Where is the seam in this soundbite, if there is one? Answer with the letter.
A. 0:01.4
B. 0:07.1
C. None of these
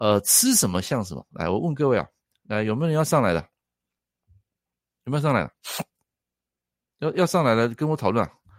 B